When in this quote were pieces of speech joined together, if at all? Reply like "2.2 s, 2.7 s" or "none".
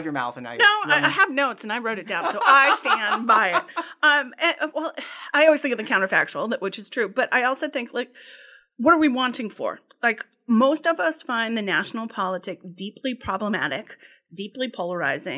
none